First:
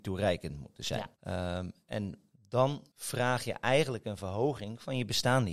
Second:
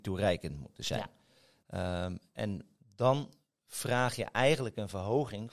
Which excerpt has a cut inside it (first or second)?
first